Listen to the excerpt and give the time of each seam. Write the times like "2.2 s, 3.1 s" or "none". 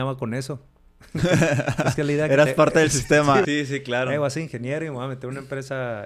3.4 s